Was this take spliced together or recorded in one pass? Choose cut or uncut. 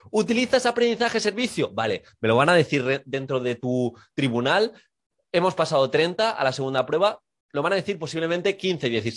uncut